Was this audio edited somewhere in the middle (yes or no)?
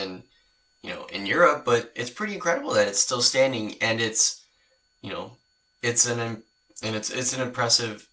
no